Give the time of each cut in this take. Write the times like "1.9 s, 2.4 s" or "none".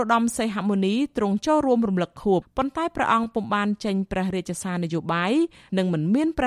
2.4 s